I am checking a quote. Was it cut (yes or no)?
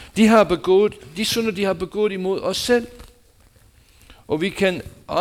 no